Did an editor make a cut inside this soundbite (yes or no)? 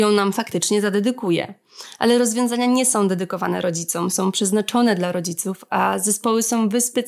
no